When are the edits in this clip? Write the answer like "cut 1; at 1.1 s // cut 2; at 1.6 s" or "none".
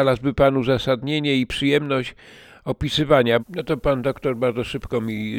cut 1; at 3.4 s